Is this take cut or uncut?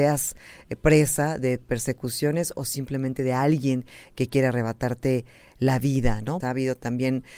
cut